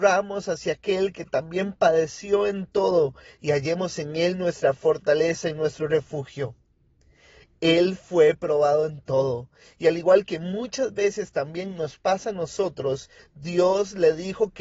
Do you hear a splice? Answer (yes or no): yes